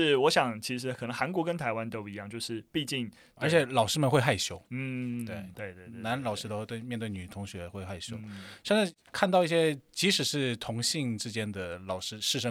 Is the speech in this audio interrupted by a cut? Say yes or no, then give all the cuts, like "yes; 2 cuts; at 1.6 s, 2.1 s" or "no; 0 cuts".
yes; 2 cuts; at 3.4 s, 5.5 s